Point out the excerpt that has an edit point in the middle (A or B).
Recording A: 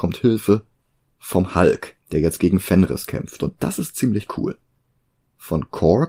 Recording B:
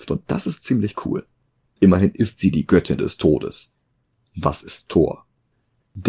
B